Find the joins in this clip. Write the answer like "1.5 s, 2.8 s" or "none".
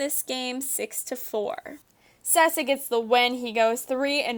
none